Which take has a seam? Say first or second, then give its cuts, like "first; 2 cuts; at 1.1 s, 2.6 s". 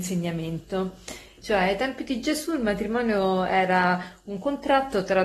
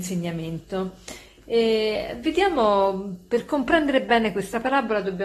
first; 1 cut; at 1.4 s